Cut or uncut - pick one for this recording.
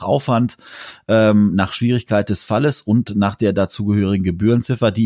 uncut